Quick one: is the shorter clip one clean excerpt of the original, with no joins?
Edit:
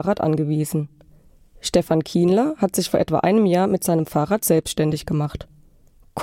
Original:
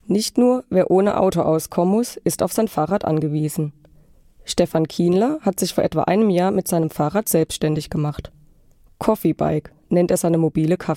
yes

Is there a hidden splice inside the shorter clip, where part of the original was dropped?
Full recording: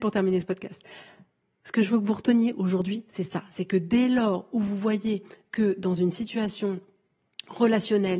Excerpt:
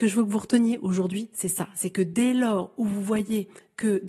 no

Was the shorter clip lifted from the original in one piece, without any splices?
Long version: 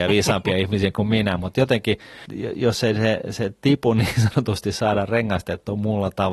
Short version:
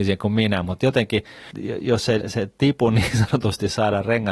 no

